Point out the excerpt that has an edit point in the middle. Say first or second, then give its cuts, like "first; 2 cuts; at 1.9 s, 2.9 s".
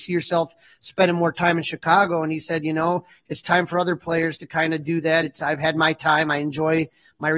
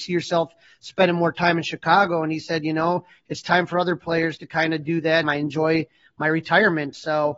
second; 1 cut; at 5.2 s